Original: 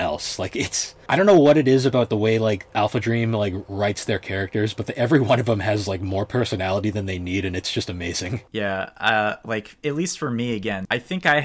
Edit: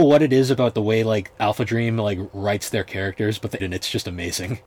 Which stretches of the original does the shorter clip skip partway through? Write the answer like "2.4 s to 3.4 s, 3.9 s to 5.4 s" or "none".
4.9 s to 7.4 s

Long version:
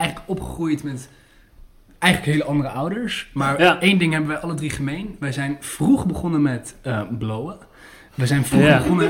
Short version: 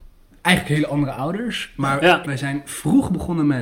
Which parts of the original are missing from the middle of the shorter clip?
3.8 s to 5.2 s

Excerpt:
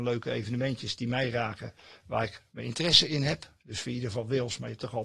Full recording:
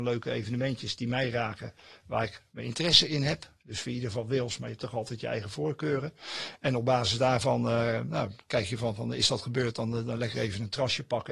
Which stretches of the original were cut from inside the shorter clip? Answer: none

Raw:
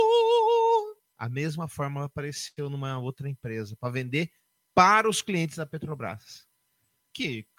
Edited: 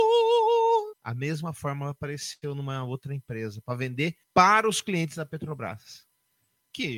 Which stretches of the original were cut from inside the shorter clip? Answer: 0.9 s to 1.1 s, 4.4 s to 4.6 s

